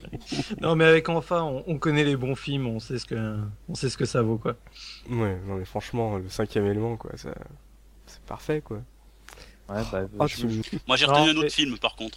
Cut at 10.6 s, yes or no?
yes